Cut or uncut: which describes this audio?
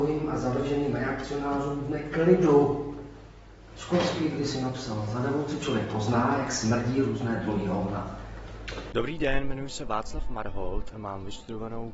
cut